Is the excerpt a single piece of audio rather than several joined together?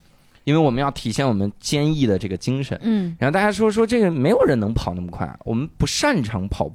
yes; 0 cuts

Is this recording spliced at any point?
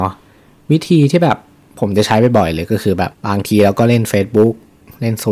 yes; 1 cut; at 3.1 s

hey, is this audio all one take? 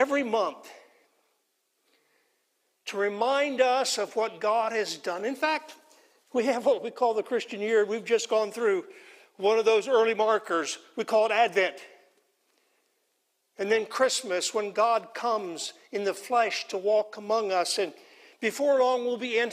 yes; 0 cuts

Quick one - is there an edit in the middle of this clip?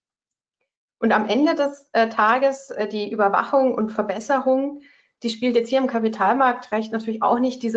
no; 0 cuts

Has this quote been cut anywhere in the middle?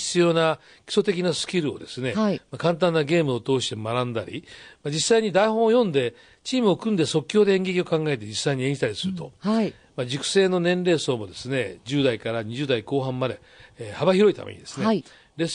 no; 0 cuts

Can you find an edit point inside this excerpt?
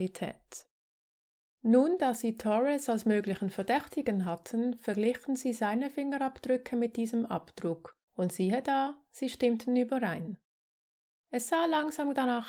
no; 0 cuts

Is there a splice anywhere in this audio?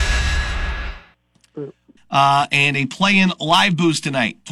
yes; 1 cut; at 2.0 s

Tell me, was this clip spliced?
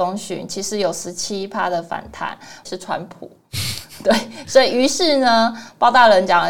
yes; 1 cut; at 2.7 s

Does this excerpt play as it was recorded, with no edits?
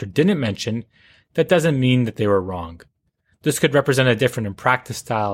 yes; 0 cuts

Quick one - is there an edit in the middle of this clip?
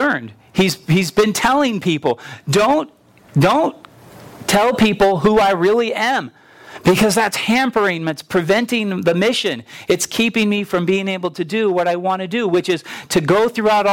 no; 0 cuts

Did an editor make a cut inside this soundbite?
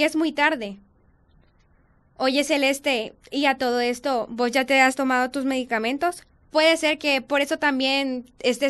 no; 0 cuts

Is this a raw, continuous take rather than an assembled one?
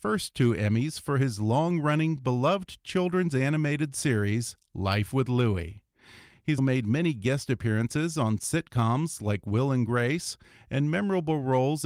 no; 1 cut; at 6.6 s

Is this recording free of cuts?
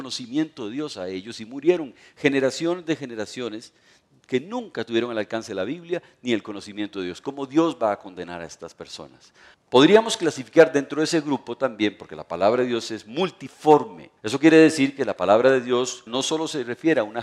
no; 3 cuts; at 9.5 s, 14.2 s, 16.1 s

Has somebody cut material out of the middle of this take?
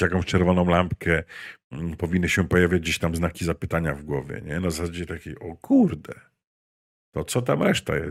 no; 0 cuts

